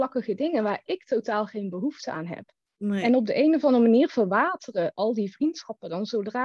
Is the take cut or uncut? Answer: uncut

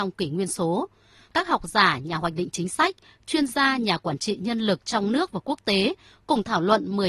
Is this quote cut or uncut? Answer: uncut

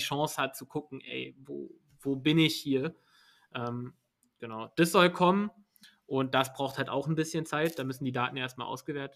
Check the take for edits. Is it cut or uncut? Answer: uncut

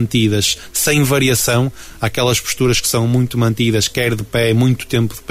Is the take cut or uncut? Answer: uncut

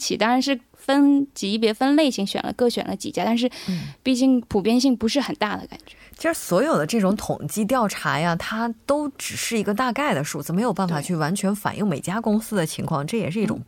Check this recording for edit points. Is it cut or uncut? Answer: uncut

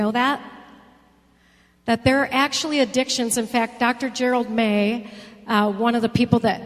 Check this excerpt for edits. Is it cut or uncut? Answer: uncut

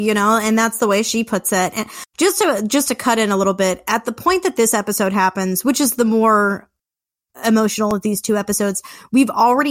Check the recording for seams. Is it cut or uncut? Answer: uncut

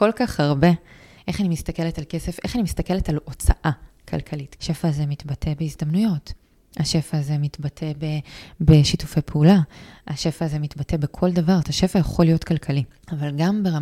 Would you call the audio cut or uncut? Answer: cut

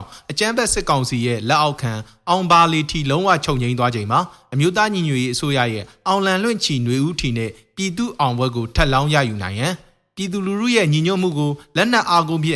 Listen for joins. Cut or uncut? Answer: uncut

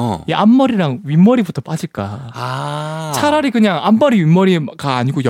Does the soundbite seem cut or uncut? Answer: uncut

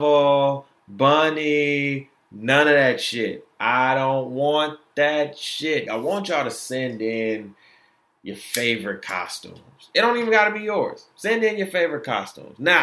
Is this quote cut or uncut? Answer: cut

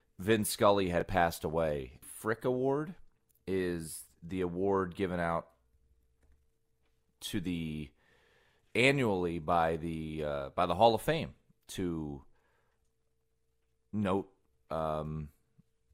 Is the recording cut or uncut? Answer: cut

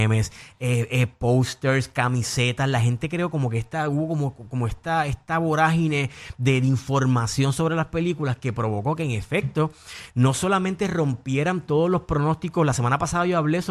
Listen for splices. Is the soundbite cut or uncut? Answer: uncut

